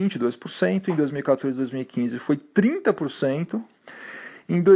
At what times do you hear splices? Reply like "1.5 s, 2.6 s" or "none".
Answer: none

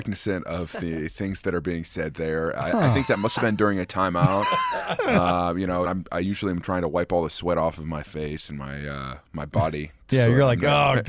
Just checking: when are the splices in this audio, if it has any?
5.8 s

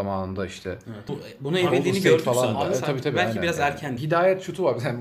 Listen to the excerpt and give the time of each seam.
1.1 s, 4.0 s

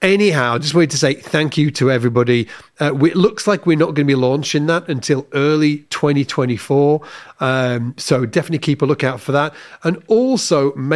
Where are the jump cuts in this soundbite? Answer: none

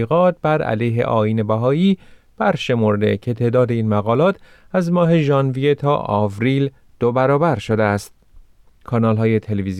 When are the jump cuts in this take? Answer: 8.8 s

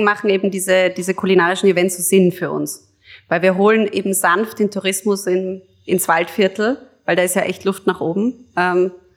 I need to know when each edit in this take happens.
none

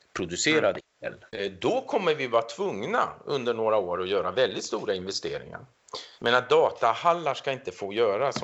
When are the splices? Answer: 1.3 s, 6.2 s

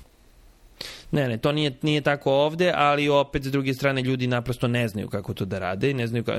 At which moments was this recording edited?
none

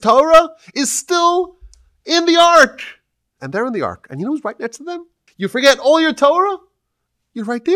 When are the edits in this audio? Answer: 3.4 s, 5.3 s

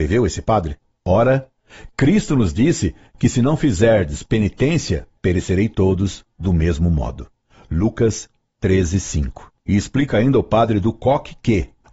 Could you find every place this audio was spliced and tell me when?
1.0 s, 5.1 s

